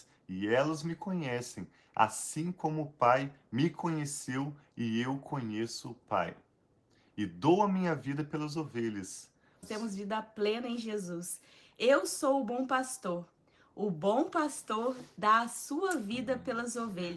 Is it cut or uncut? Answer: cut